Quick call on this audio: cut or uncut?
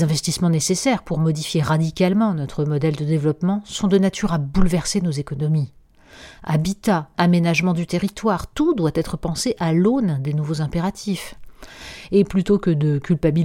cut